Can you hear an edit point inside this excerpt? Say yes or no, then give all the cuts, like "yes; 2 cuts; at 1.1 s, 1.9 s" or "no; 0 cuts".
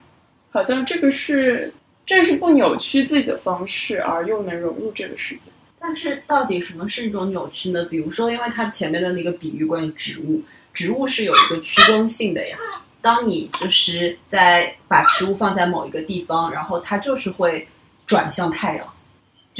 no; 0 cuts